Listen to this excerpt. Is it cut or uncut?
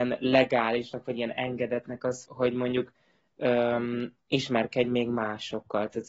cut